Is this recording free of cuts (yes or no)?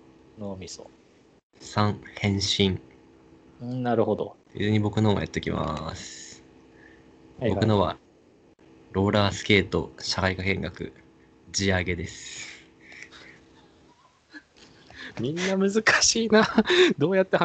no